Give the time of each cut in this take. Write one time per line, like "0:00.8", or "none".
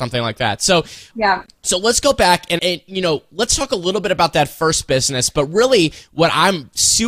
0:01.1
0:02.6